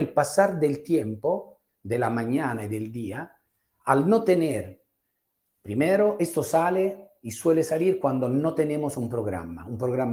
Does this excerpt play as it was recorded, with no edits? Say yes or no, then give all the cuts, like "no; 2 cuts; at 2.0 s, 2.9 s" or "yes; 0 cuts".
yes; 0 cuts